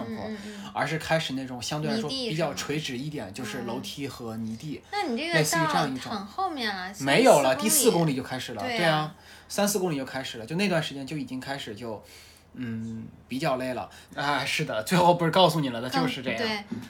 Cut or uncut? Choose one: cut